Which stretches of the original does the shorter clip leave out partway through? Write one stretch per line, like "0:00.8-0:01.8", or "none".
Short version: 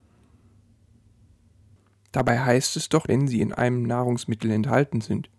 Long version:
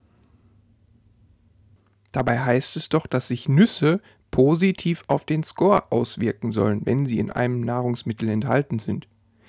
0:03.1-0:06.8